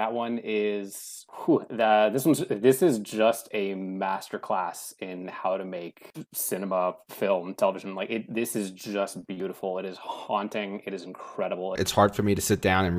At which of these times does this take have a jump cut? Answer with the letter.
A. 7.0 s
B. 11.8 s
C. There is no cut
B